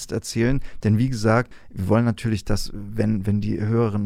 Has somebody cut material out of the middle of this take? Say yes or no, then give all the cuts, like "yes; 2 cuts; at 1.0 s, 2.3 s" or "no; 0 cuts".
no; 0 cuts